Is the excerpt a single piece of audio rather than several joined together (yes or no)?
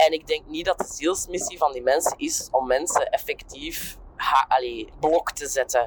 no